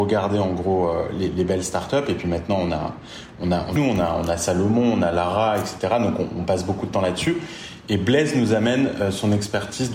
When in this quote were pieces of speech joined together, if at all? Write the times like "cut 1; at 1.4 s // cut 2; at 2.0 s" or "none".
cut 1; at 3.8 s